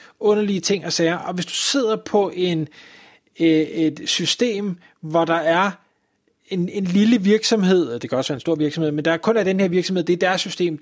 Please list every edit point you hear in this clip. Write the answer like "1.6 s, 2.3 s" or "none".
none